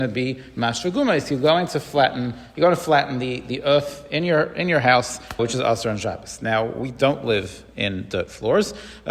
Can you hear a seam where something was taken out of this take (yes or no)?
yes